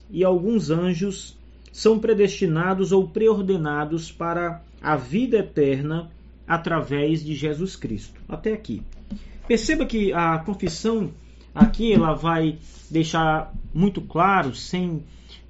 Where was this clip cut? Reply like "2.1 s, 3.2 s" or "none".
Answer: none

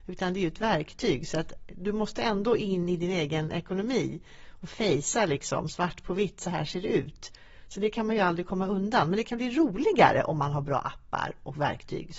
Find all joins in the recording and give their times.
none

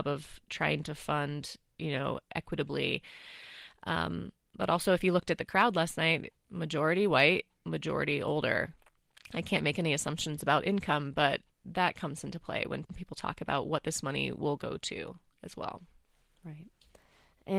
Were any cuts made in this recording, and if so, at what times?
11.5 s, 12.8 s

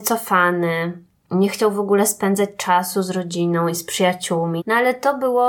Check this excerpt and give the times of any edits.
4.6 s

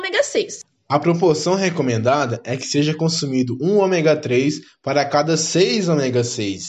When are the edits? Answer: none

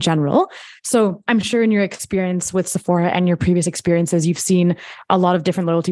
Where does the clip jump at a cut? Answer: none

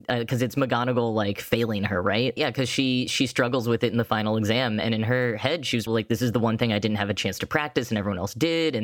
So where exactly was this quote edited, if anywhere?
2.4 s, 5.9 s

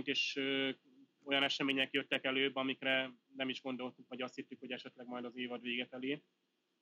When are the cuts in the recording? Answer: none

